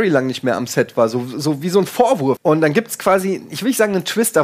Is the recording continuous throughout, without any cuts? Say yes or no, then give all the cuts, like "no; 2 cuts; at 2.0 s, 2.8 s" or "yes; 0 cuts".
no; 1 cut; at 2.4 s